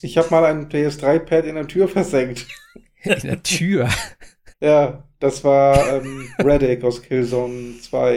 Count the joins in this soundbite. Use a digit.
1